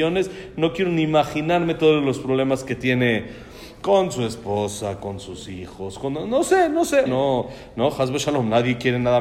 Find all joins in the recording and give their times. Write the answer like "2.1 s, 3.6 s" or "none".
7.1 s